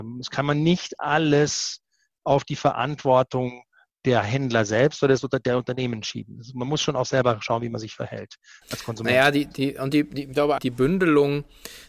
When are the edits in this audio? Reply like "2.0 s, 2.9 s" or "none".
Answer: 10.6 s